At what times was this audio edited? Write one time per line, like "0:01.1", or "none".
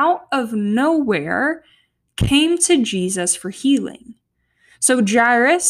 none